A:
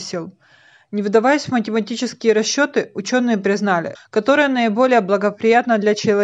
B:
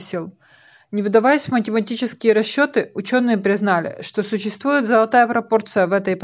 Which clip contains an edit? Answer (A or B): A